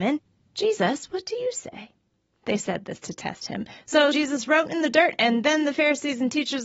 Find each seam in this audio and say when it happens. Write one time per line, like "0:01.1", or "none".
0:04.1